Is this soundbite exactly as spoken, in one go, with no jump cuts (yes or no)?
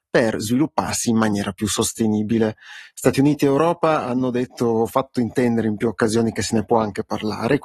yes